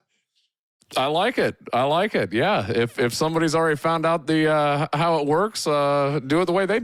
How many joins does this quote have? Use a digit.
0